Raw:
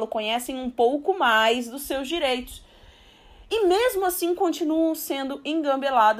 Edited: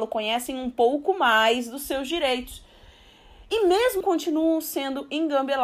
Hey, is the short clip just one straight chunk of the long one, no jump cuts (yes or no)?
no